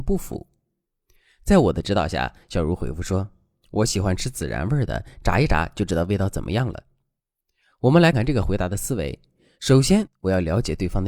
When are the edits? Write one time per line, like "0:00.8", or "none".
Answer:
0:08.1